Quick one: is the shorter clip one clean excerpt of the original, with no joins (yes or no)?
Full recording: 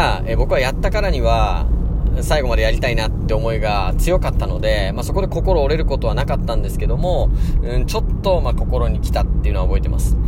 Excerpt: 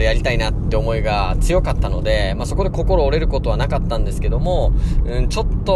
yes